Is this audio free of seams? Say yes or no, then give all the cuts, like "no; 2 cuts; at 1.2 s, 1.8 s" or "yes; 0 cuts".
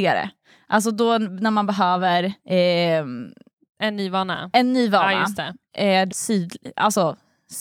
no; 2 cuts; at 2.4 s, 6.1 s